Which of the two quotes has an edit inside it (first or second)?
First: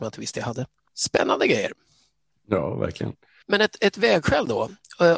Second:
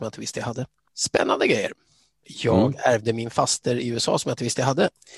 second